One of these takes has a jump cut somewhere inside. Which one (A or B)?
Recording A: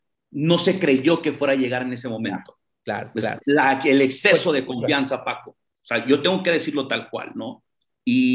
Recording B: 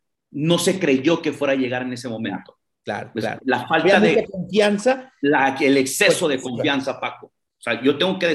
A